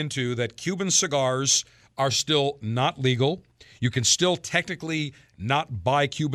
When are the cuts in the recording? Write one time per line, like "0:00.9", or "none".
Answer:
none